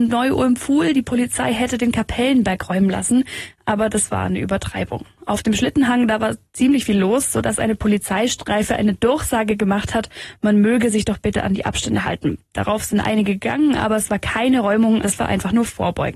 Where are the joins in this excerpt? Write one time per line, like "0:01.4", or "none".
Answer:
0:15.0